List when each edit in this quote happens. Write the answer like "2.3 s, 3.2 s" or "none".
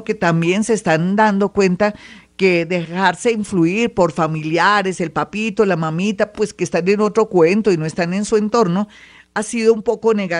none